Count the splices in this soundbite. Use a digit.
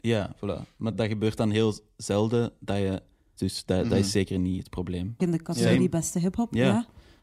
3